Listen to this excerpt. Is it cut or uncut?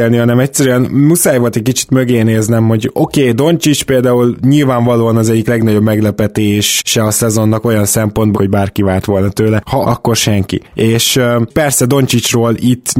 cut